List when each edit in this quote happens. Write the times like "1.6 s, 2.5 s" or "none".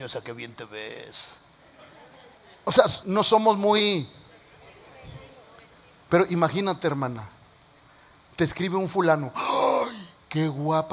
3.0 s